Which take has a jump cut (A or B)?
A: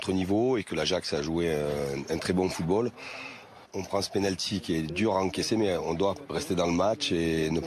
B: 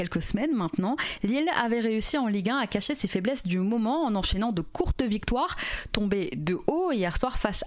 A